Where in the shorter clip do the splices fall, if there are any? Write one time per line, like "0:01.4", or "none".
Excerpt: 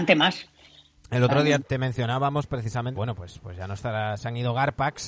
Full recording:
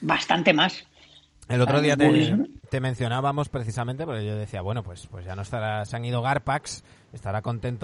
0:01.6
0:02.9